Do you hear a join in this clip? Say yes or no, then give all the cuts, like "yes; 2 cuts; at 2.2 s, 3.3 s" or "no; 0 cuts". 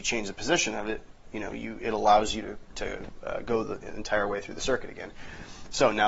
no; 0 cuts